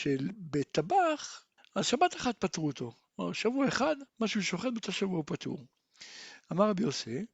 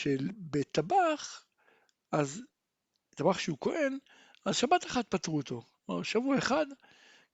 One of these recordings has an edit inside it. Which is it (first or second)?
first